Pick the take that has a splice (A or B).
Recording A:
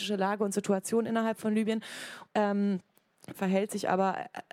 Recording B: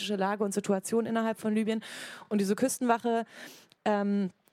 A